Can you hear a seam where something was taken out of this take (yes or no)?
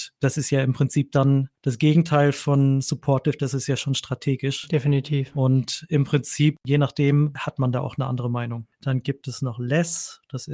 yes